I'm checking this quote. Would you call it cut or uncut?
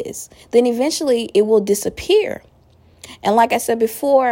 uncut